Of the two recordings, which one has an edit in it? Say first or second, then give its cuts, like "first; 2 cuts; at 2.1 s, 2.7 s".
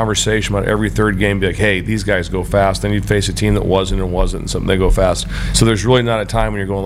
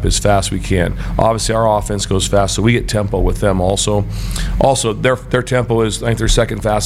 first; 1 cut; at 5.5 s